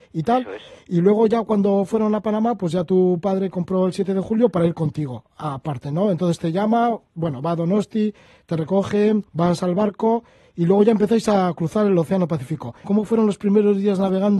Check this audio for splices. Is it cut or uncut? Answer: cut